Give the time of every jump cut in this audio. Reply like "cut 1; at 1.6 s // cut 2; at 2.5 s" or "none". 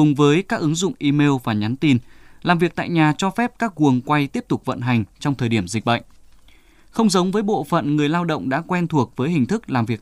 none

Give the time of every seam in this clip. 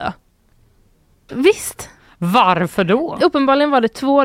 cut 1; at 1.3 s

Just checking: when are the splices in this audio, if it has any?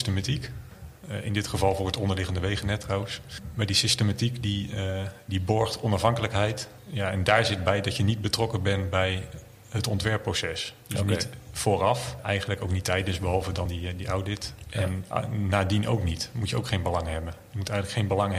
none

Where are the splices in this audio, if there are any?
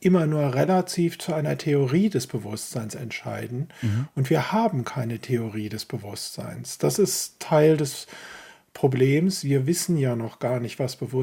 none

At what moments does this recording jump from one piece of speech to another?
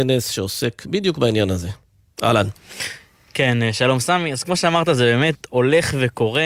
none

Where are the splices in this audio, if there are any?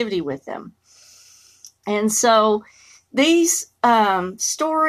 cut 1; at 1.8 s

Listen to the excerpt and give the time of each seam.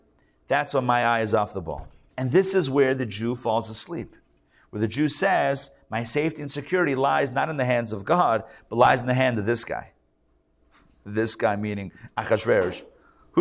cut 1; at 2.1 s

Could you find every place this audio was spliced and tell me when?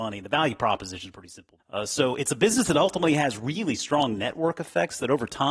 cut 1; at 1.6 s

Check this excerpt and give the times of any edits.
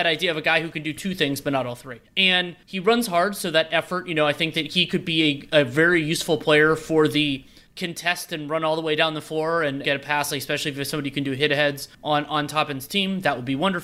cut 1; at 9.8 s

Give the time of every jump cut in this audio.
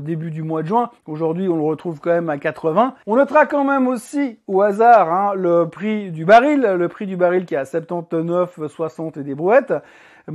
cut 1; at 1.0 s // cut 2; at 3.0 s

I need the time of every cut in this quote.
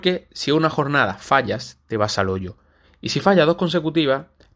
none

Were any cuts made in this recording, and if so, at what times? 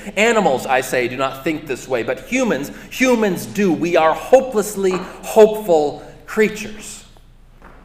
none

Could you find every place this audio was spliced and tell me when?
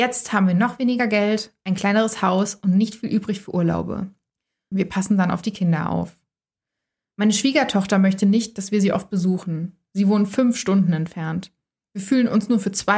cut 1; at 4.7 s

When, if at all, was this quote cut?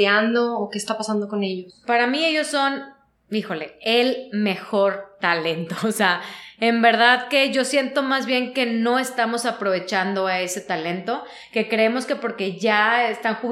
none

